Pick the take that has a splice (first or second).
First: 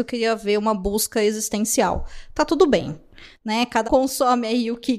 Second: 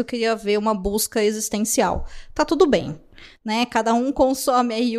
first